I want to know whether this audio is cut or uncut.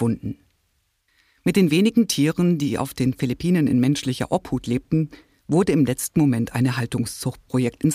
uncut